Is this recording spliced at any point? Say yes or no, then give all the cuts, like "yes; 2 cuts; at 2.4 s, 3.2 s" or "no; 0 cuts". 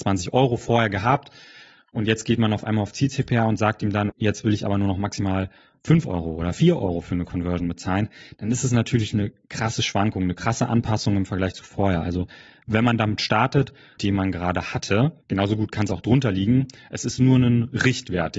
yes; 3 cuts; at 4.1 s, 14.0 s, 15.2 s